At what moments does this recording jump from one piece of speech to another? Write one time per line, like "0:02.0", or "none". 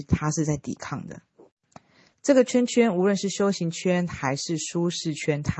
0:02.1